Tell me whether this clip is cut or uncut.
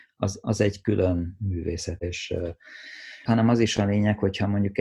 cut